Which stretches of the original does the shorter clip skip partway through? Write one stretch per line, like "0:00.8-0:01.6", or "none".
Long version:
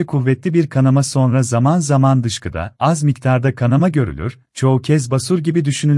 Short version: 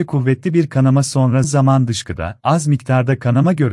0:01.4-0:01.8